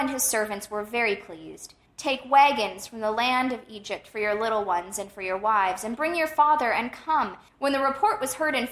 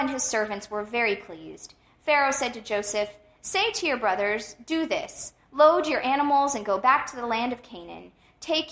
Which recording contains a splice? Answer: first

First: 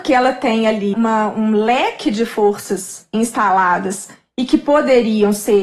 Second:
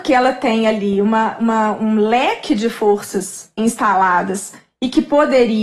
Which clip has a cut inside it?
first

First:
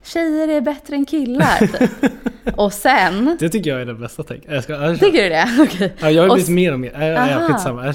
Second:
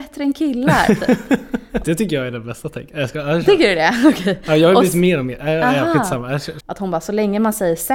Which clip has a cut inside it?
second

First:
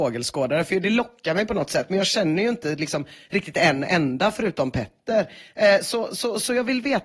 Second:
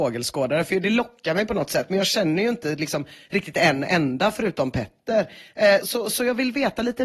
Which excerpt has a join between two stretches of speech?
second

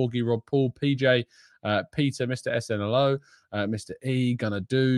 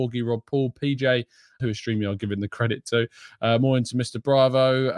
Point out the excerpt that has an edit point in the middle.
second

